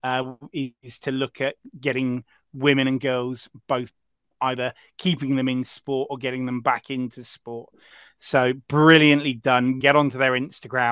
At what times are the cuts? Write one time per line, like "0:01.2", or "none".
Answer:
0:09.8